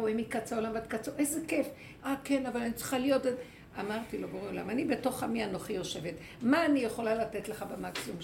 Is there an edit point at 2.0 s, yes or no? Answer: yes